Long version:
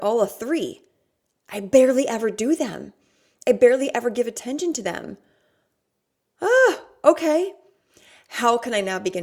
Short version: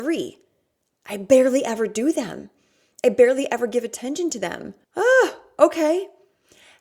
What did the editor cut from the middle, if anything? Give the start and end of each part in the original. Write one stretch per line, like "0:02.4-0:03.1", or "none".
0:05.3-0:06.3